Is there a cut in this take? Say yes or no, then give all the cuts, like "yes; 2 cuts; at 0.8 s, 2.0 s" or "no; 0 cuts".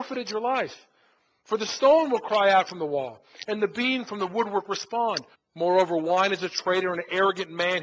yes; 1 cut; at 5.3 s